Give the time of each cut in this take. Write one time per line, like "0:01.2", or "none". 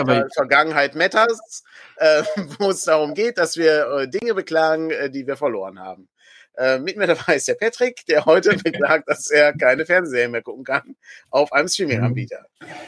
none